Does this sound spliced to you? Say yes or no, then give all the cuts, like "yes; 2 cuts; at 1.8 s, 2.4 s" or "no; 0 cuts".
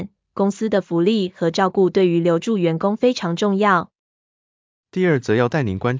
no; 0 cuts